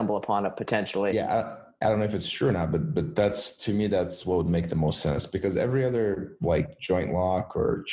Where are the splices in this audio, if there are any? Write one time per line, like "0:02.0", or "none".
none